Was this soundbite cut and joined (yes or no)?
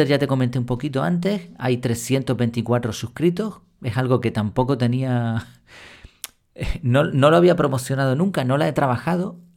no